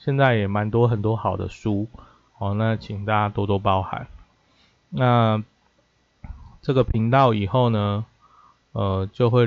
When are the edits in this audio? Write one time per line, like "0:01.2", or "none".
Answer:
0:02.3